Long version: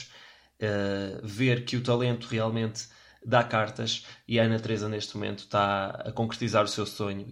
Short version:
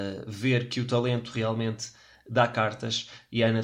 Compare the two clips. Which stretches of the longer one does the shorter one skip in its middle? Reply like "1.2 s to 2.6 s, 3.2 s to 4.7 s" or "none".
none